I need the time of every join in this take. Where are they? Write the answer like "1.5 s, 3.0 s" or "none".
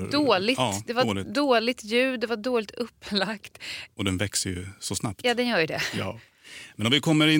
3.9 s